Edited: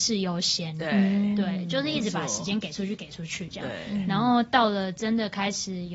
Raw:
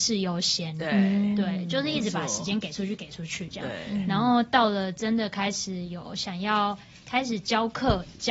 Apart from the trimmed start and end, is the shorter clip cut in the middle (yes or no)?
no